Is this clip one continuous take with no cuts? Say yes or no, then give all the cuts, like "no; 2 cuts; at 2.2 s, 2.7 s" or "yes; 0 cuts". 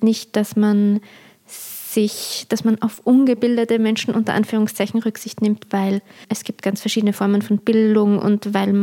no; 1 cut; at 6.2 s